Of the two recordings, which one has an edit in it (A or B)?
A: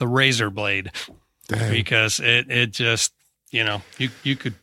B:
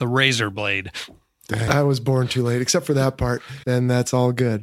B